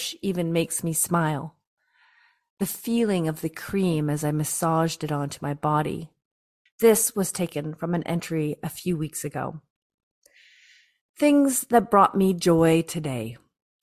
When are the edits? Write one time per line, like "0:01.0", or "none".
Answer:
0:06.7